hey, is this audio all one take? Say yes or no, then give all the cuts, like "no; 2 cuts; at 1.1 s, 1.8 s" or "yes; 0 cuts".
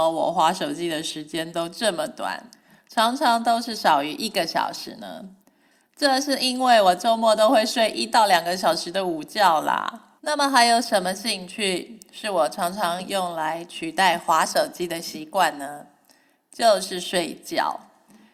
no; 1 cut; at 10.2 s